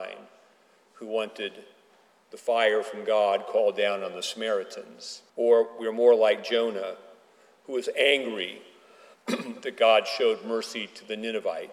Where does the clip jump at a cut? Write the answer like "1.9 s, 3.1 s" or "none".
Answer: 5.3 s